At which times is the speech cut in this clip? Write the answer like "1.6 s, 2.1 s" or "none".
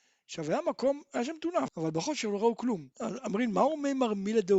1.7 s, 2.9 s